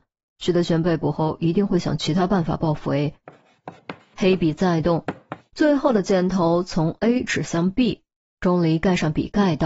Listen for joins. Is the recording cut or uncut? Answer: cut